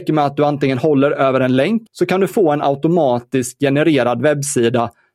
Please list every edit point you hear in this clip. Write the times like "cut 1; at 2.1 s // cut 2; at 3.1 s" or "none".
cut 1; at 1.9 s